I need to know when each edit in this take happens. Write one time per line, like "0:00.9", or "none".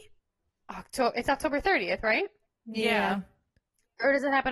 none